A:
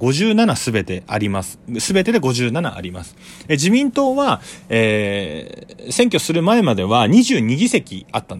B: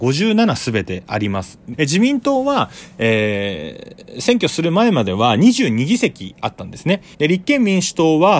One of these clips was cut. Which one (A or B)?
B